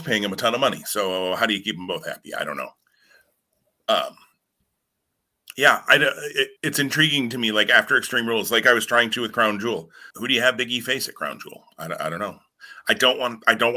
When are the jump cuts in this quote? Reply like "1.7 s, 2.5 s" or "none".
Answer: 6.6 s, 10.1 s